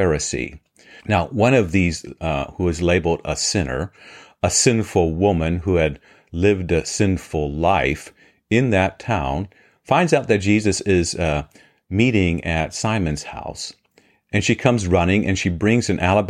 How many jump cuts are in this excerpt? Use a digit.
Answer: 1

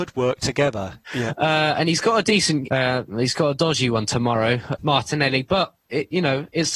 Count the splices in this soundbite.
3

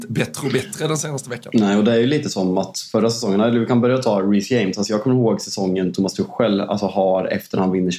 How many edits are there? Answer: 0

